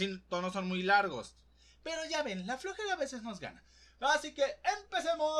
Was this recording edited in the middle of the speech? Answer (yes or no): no